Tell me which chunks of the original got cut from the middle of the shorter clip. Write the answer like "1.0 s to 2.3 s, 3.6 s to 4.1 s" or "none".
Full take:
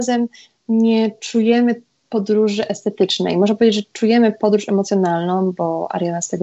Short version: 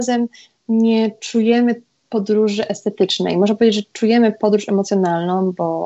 none

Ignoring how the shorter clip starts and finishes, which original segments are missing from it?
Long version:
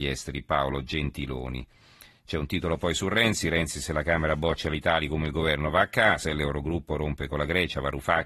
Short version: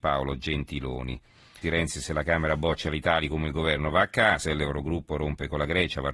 2.1 s to 3.4 s

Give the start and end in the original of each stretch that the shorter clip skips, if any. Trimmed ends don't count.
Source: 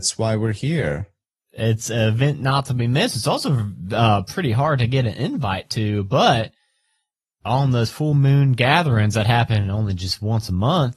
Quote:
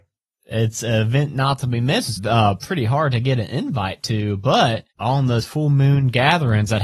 3.2 s to 3.8 s, 6.6 s to 7.4 s

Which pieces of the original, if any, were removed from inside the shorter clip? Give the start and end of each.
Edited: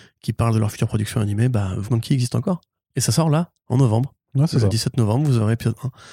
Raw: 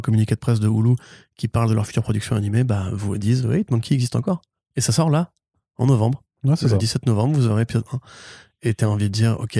3.0 s to 3.7 s, 5.4 s to 5.7 s

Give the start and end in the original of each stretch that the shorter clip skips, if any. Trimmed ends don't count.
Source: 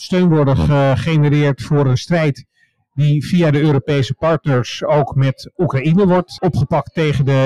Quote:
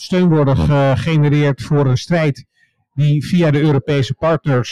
none

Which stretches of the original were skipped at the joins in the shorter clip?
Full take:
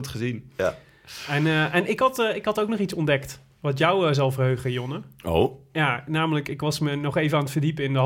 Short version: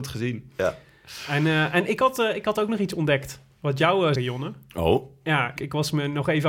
4.1 s to 4.6 s, 6.0 s to 6.4 s

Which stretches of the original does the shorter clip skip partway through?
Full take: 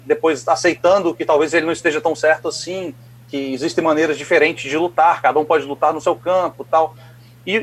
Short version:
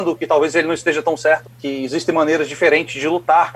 2.4 s to 3.1 s

